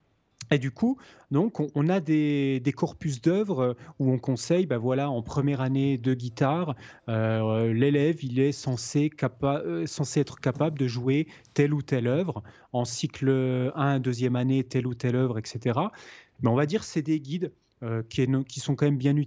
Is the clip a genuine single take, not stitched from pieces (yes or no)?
no